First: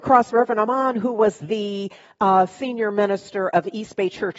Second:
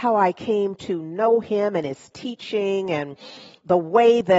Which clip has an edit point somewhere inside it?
first; 1 cut; at 1.4 s

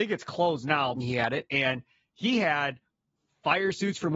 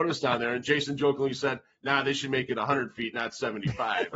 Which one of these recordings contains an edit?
first; 1 cut; at 0.9 s

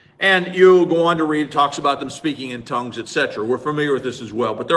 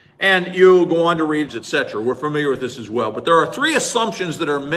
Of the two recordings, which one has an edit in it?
second; 1 cut; at 1.5 s

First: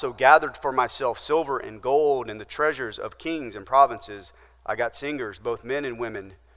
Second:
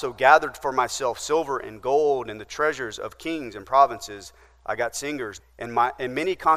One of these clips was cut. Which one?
second; 1 cut; at 5.4 s

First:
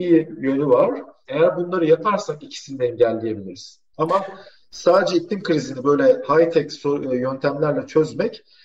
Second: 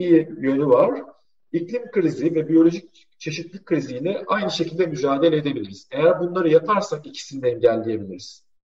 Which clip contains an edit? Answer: first; 2 cuts; at 1.3 s, 3.9 s

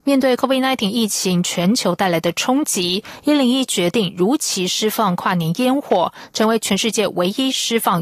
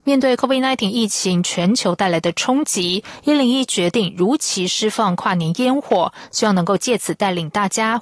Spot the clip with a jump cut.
second; 1 cut; at 6.3 s

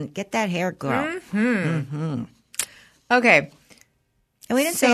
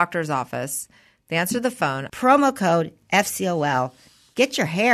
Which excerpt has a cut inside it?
second; 1 cut; at 2.1 s

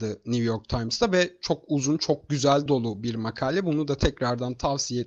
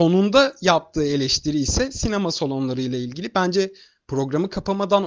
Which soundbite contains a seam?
first; 1 cut; at 2.7 s

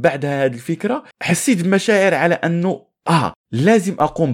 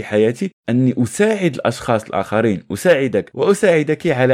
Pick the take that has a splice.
first; 1 cut; at 1.1 s

